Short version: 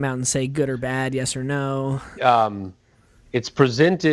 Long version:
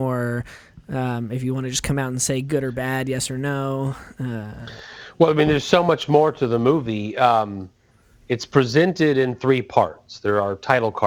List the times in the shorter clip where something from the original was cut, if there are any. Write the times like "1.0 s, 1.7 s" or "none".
2.2 s